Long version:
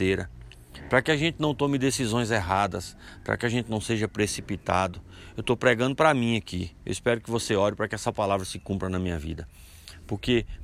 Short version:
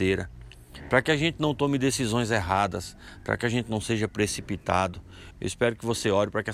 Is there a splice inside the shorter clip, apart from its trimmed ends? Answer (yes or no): yes